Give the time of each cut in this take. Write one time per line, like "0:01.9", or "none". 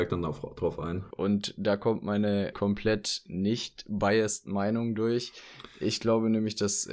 0:01.1
0:02.5